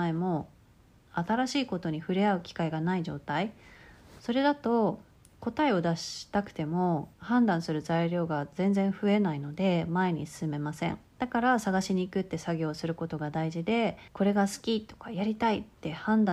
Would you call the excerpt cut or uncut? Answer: cut